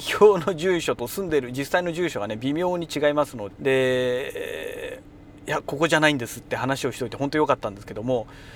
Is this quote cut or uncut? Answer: cut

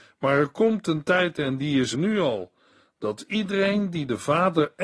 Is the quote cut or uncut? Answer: cut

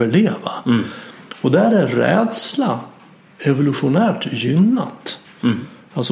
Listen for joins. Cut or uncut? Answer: uncut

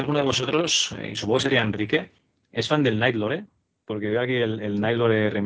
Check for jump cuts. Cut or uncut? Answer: uncut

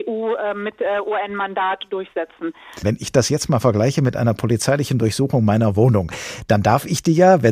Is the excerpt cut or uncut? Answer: cut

